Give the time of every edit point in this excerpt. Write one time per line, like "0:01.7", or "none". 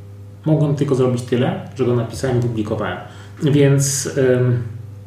0:03.4